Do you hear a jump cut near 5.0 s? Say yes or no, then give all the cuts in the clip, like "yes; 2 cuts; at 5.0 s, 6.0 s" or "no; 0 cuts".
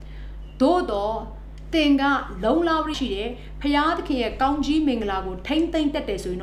no; 1 cut; at 2.9 s